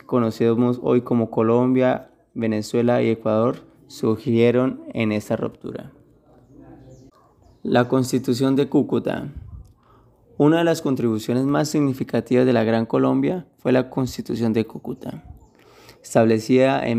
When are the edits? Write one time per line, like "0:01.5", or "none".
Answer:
none